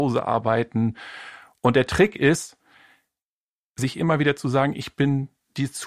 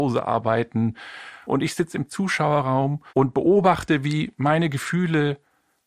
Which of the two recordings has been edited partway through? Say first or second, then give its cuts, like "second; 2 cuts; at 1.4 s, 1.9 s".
second; 2 cuts; at 1.4 s, 3.1 s